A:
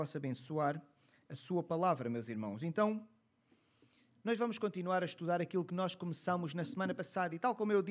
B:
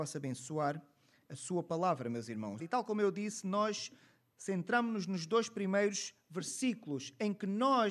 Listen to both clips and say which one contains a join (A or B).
B